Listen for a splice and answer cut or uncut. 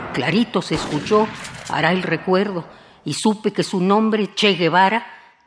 uncut